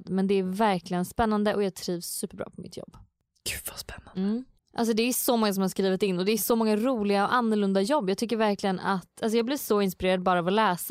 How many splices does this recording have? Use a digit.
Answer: 1